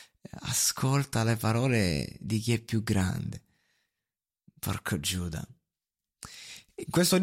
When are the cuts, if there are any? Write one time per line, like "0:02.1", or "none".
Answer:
none